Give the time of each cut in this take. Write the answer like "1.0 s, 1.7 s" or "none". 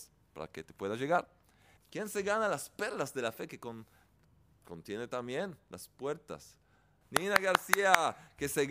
1.8 s, 7.0 s

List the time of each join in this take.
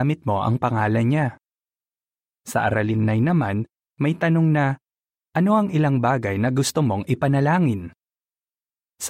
none

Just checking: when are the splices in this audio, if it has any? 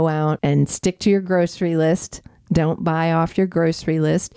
none

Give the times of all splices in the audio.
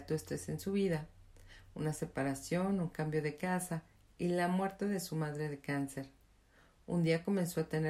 none

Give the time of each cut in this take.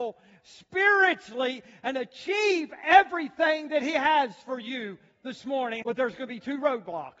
5.8 s

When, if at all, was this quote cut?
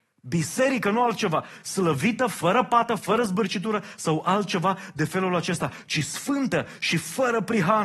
none

